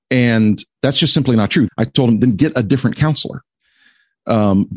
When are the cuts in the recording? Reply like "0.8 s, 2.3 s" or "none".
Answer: 1.7 s